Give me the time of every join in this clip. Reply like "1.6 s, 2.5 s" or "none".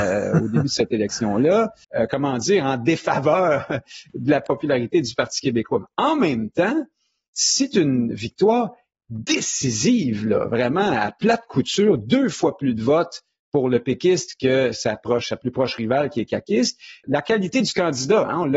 1.8 s, 17.0 s